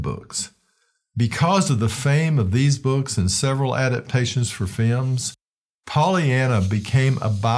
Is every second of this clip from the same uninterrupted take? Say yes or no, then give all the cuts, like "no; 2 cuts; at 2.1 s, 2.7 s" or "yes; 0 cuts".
yes; 0 cuts